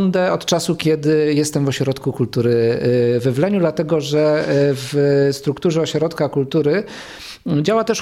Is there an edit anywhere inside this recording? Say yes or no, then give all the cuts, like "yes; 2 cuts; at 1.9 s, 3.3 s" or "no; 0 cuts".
no; 0 cuts